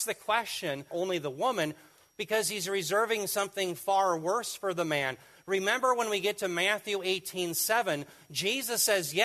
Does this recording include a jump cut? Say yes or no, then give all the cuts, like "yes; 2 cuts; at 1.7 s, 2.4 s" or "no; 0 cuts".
yes; 1 cut; at 0.9 s